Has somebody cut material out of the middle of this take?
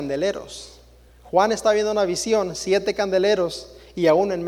no; 0 cuts

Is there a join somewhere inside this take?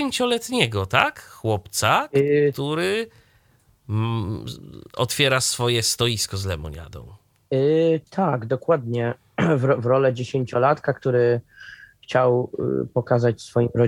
no; 0 cuts

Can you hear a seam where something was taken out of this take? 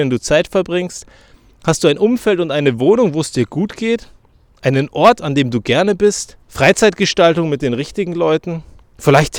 yes; 1 cut; at 6.4 s

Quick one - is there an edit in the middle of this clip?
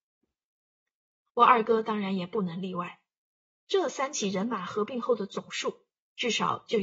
yes; 1 cut; at 3.6 s

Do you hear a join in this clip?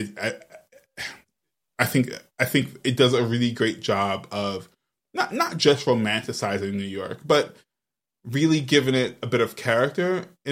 no; 0 cuts

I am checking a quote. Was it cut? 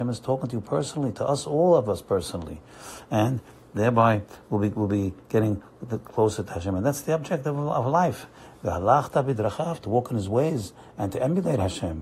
no; 0 cuts

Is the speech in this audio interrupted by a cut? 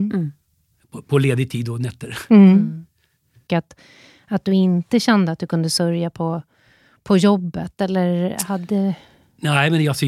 yes; 1 cut; at 3.5 s

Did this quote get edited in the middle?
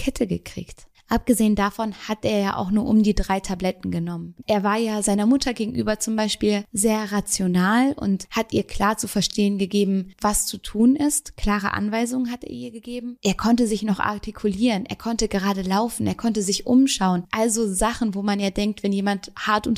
yes; 1 cut; at 4.4 s

